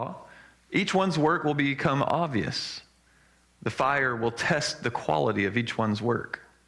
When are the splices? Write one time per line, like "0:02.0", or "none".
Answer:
0:03.4